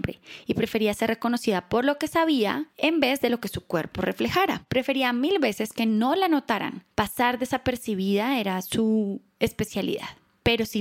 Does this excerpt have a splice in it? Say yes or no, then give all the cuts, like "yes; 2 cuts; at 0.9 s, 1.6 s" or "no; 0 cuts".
no; 0 cuts